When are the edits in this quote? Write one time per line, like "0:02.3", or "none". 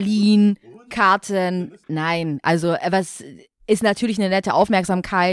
0:01.8

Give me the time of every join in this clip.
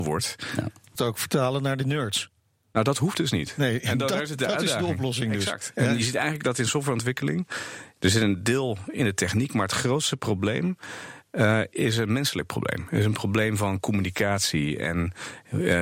0:01.0

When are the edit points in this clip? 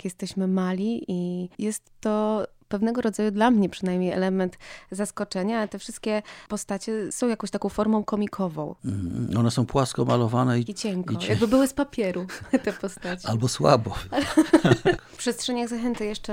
0:10.7
0:15.0

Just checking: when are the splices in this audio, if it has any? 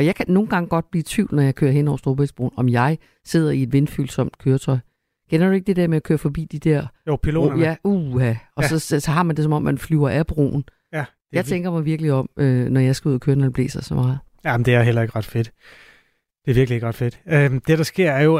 none

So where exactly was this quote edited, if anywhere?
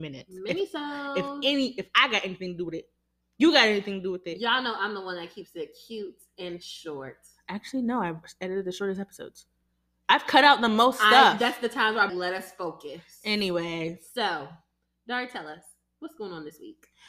0:12.1

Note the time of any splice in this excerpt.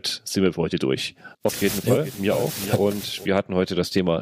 0:01.3

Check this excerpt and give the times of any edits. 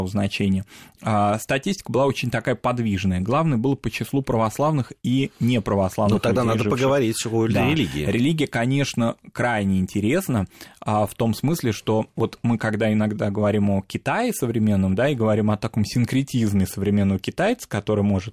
none

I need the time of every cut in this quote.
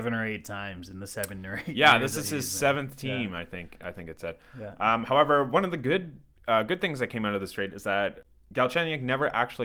none

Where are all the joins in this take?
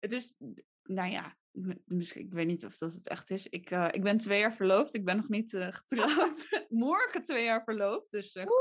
none

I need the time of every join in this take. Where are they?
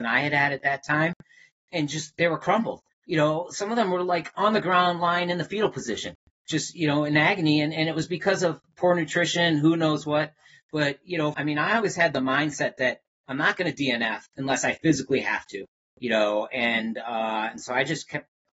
0:11.3

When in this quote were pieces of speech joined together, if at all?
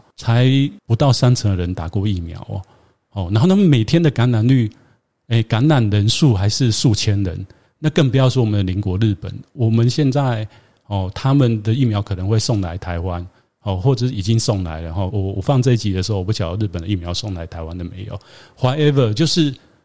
0:15.1

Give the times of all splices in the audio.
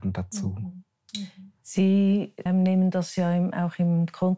0:02.5

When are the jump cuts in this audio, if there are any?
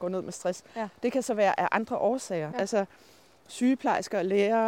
0:02.5

